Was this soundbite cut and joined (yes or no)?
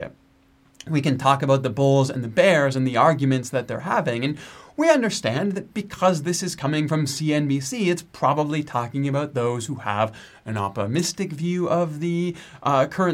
no